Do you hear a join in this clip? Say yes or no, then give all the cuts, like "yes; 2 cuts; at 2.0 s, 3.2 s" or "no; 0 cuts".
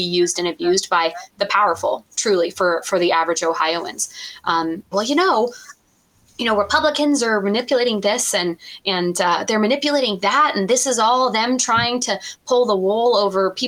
yes; 1 cut; at 4.9 s